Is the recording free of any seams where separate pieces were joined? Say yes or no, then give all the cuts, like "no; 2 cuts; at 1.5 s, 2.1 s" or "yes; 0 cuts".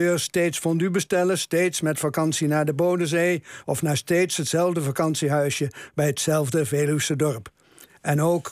yes; 0 cuts